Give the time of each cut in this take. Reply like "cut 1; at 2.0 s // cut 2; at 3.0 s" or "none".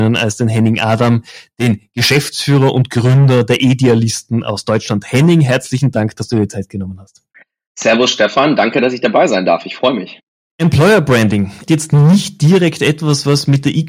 cut 1; at 10.5 s // cut 2; at 11.7 s